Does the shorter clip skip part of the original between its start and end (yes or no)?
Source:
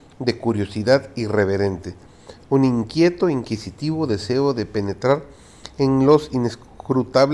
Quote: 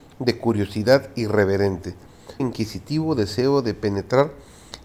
yes